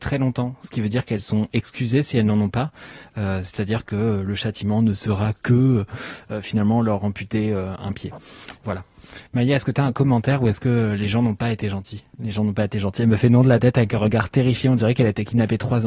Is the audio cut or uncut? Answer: uncut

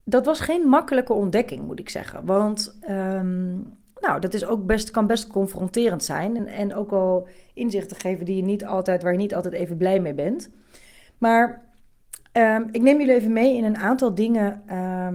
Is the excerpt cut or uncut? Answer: uncut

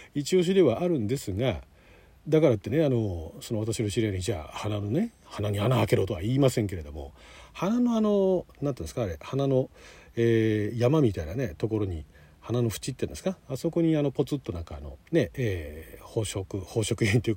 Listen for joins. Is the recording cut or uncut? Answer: cut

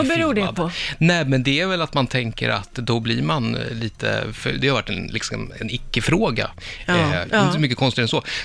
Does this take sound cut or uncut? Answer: cut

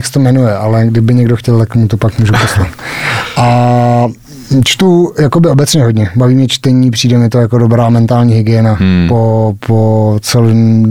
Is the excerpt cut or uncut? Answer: uncut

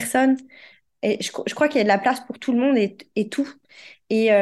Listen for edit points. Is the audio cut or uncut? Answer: uncut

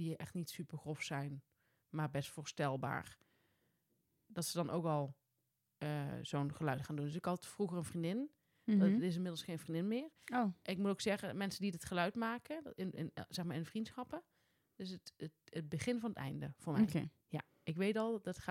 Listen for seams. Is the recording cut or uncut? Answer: uncut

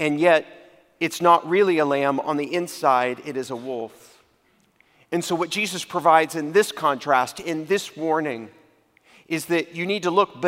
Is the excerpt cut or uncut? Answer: uncut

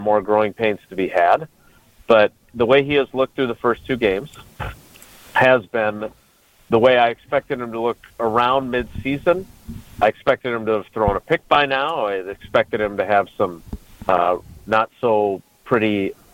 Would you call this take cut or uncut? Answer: uncut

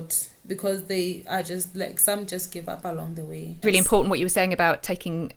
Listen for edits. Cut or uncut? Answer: cut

